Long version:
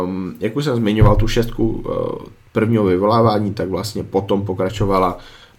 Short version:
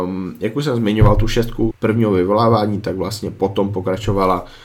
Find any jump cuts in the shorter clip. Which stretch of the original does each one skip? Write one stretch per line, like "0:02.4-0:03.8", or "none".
0:01.7-0:02.4